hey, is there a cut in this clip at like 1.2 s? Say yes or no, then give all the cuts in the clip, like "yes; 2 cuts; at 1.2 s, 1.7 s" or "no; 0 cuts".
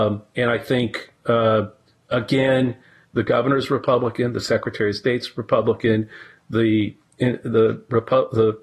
no; 1 cut; at 3.0 s